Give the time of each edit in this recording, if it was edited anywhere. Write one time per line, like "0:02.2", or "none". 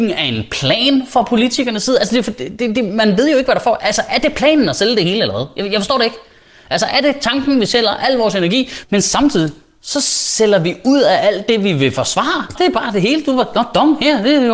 0:08.8
0:12.6